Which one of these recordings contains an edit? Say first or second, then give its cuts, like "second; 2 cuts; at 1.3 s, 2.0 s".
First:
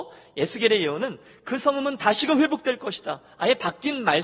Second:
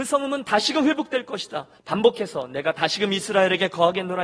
second; 1 cut; at 1.8 s